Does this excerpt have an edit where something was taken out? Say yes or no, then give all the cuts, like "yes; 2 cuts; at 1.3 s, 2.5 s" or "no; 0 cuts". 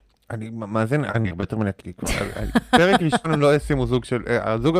yes; 1 cut; at 1.8 s